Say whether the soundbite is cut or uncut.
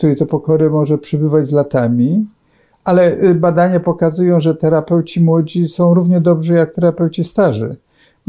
uncut